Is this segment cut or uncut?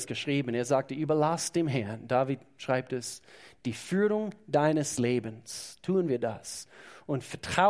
uncut